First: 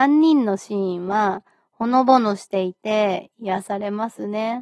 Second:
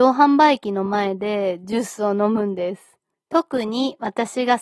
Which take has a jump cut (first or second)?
second